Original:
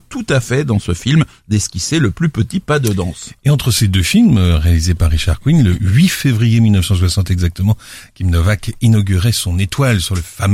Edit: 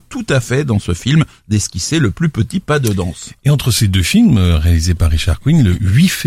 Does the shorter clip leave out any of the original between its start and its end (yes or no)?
no